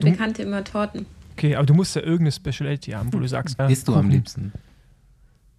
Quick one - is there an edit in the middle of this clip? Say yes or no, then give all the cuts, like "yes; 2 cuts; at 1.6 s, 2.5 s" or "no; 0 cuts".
yes; 1 cut; at 3.6 s